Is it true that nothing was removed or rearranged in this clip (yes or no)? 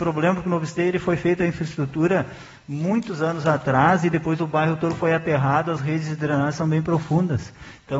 yes